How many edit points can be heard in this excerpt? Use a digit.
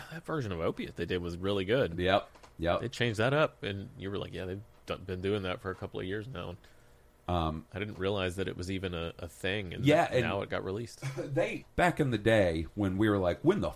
1